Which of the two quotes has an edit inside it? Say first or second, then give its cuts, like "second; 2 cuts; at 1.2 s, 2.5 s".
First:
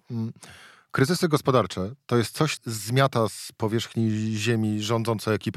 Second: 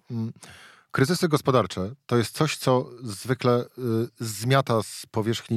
first; 1 cut; at 2.6 s